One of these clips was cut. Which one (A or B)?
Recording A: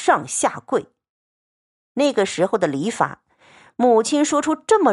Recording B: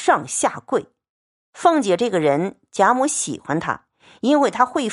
B